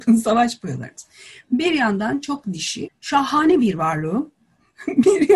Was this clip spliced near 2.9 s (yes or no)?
yes